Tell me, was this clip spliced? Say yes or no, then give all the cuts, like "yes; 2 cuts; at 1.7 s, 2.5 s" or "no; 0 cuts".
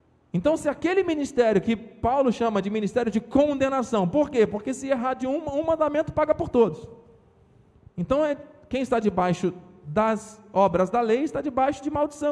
no; 0 cuts